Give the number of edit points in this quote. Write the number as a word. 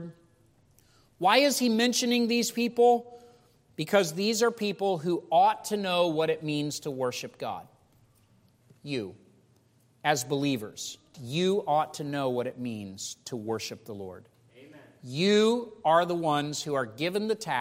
one